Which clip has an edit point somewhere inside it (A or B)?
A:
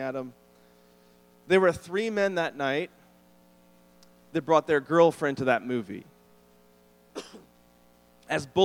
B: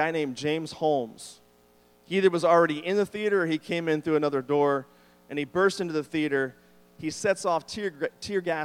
A